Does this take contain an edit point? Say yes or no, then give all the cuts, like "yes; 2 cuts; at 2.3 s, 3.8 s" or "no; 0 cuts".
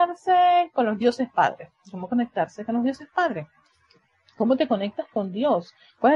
no; 0 cuts